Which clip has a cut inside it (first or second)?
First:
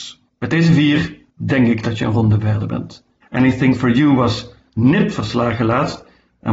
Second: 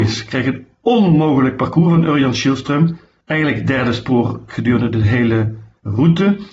first